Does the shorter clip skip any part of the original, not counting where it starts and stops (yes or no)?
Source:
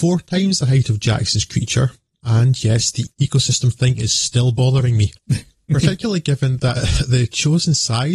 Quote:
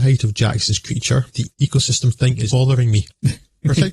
yes